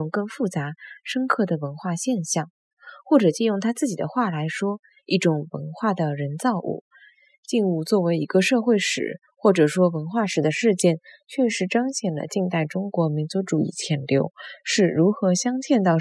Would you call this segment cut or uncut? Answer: uncut